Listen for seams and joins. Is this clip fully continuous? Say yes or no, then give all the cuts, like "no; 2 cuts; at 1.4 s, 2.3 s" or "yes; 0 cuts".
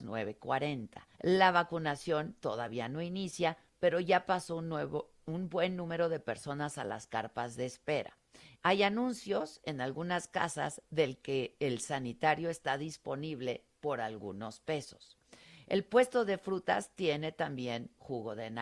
no; 2 cuts; at 1.1 s, 8.5 s